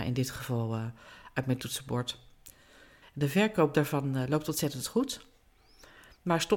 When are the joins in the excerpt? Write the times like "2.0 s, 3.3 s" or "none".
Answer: 3.0 s